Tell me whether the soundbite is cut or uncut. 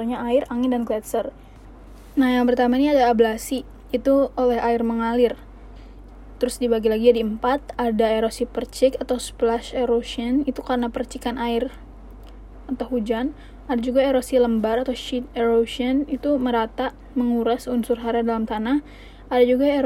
uncut